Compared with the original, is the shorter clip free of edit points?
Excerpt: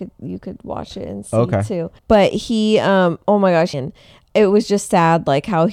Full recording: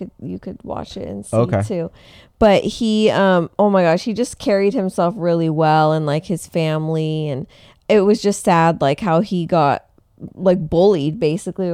no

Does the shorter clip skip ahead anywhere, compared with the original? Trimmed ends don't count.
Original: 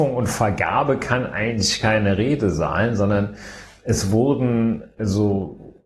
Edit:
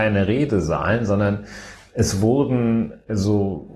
no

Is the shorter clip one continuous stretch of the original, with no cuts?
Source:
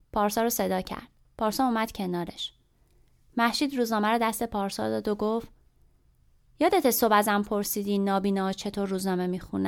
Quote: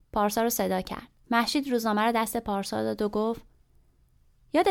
no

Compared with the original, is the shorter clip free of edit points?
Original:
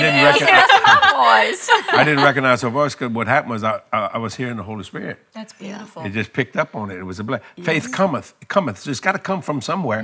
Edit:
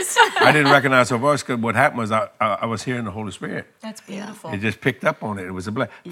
yes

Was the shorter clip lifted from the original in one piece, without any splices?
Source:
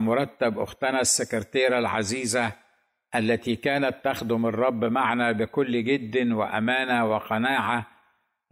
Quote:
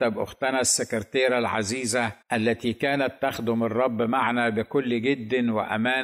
no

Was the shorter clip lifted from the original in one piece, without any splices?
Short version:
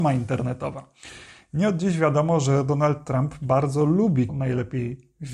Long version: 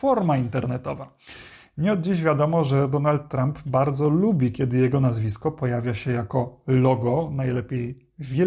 no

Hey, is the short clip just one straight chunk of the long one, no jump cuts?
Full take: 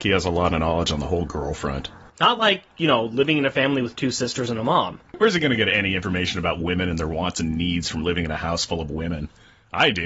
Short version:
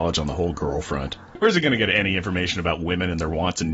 no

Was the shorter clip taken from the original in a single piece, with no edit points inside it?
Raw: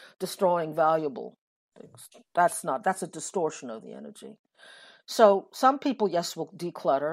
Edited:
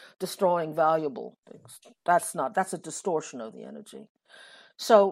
no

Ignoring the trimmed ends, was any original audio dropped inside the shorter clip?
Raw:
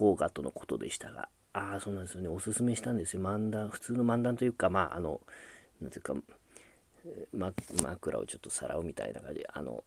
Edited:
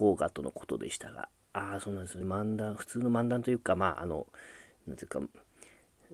yes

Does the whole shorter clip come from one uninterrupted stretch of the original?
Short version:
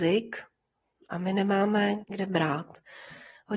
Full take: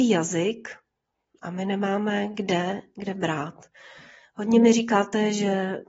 no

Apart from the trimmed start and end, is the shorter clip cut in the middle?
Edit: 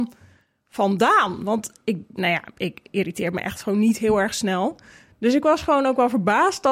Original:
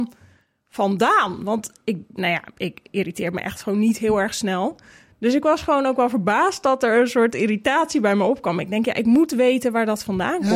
no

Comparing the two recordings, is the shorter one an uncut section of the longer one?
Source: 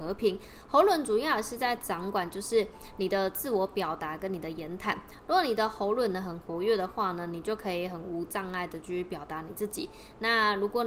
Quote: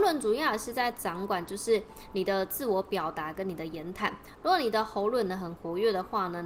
yes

